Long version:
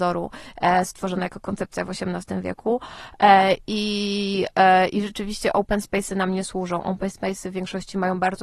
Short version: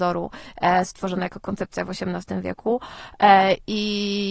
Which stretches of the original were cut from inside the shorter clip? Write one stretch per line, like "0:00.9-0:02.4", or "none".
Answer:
none